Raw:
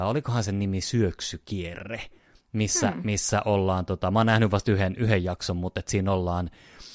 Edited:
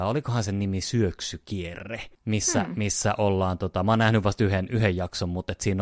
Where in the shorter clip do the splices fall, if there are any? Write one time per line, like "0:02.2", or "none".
0:02.1